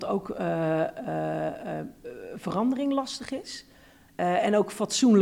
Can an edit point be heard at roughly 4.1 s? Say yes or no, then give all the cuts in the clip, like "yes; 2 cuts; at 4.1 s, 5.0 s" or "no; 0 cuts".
yes; 1 cut; at 4.1 s